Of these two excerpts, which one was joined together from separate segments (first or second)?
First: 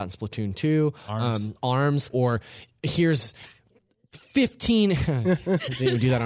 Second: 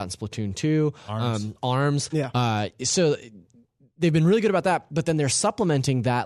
first